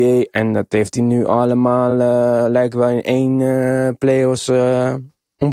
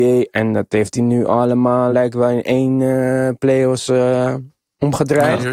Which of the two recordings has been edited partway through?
second; 1 cut; at 1.9 s

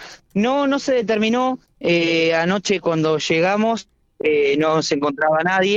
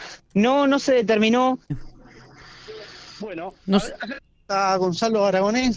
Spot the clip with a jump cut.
second; 1 cut; at 1.7 s

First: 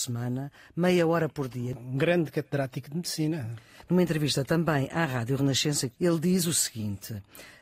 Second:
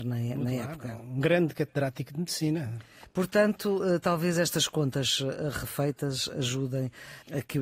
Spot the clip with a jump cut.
first; 2 cuts; at 1.7 s, 3.9 s

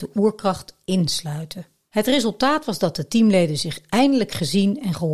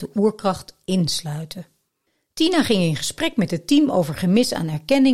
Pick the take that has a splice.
first; 1 cut; at 1.9 s

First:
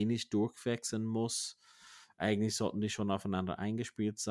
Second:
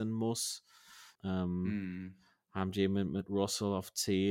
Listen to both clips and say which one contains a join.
second; 1 cut; at 1.2 s

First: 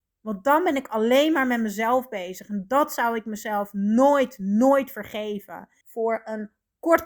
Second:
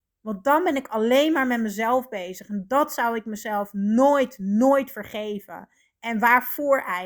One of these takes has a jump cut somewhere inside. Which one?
first; 1 cut; at 5.8 s

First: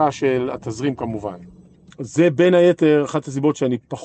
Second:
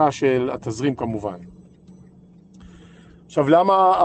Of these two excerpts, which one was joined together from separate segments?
first; 1 cut; at 1.9 s

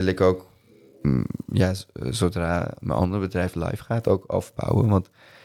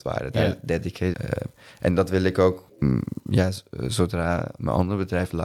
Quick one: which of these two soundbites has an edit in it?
second; 2 cuts; at 1.1 s, 2.7 s

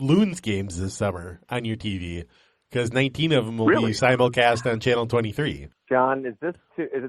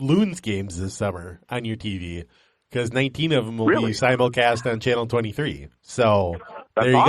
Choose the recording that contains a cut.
first; 1 cut; at 5.7 s

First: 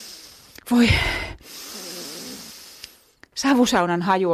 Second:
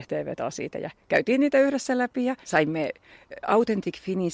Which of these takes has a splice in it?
second; 1 cut; at 2.4 s

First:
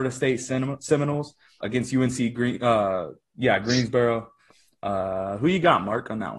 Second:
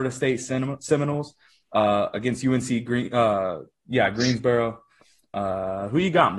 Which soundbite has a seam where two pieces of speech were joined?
first; 1 cut; at 1.6 s

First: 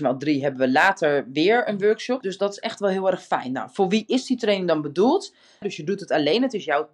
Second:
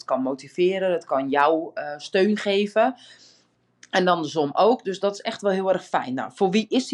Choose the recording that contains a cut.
first; 2 cuts; at 2.2 s, 5.6 s

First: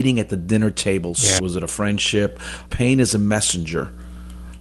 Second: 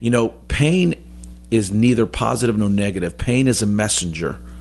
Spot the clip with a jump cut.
first; 2 cuts; at 1.4 s, 2.7 s

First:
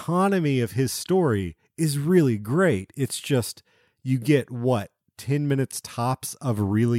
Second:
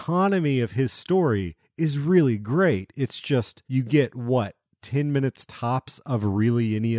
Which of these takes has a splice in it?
second; 1 cut; at 3.6 s

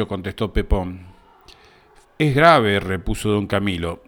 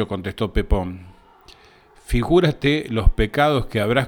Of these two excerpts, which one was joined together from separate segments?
first; 1 cut; at 2.0 s

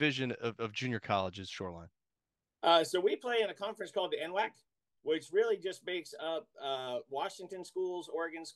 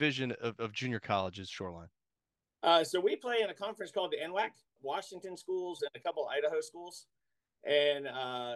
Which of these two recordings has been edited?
second; 2 cuts; at 4.8 s, 5.8 s

